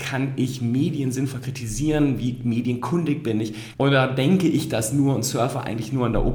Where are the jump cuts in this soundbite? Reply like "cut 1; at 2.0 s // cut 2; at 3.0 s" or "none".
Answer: cut 1; at 3.7 s

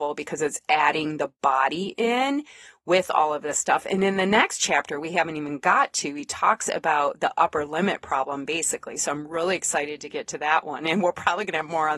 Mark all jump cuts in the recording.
none

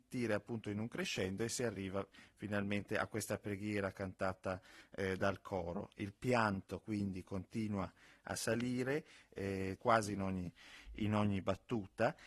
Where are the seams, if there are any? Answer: cut 1; at 9.8 s

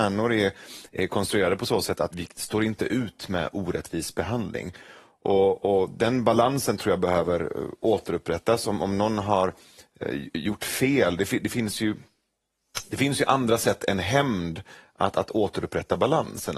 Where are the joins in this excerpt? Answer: cut 1; at 2.1 s

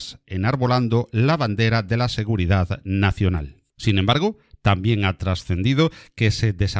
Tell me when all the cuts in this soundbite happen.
cut 1; at 3.7 s

